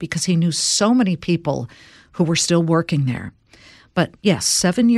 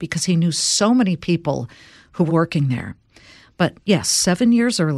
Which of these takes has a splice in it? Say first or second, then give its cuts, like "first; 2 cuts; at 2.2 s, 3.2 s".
second; 1 cut; at 2.3 s